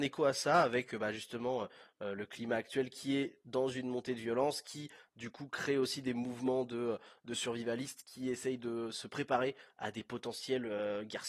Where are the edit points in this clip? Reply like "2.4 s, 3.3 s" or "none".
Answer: none

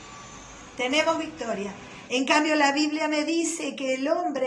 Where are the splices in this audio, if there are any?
2.1 s

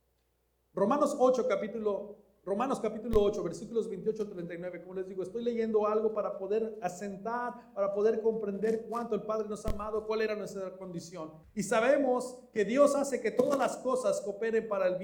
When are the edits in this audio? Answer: 11.4 s

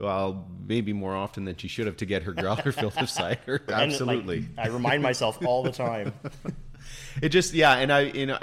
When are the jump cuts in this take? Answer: 3.7 s

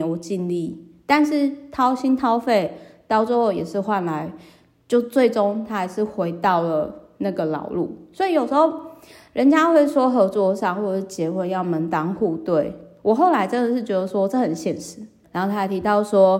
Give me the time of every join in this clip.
15.2 s

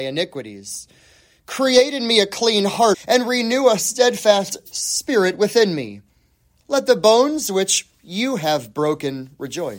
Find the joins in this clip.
2.9 s, 6.6 s

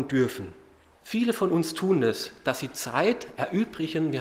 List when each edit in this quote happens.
1.0 s

